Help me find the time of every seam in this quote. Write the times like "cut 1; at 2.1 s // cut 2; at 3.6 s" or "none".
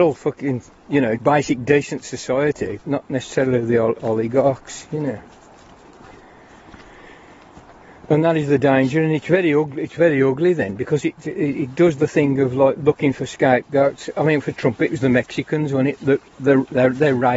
cut 1; at 1.2 s // cut 2; at 2.8 s